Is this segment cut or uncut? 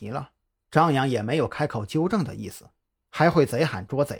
cut